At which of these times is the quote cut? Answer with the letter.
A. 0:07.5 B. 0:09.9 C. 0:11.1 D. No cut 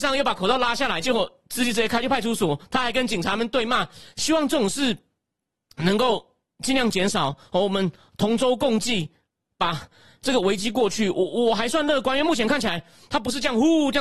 D